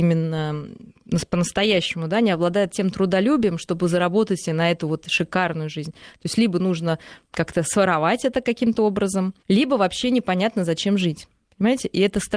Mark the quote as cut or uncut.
cut